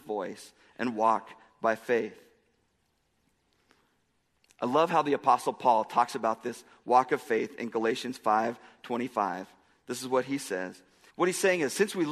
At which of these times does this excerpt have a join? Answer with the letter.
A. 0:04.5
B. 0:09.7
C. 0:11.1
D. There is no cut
C